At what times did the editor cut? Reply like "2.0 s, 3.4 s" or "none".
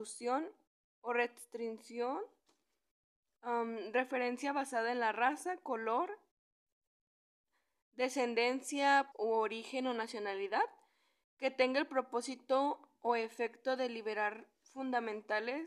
9.1 s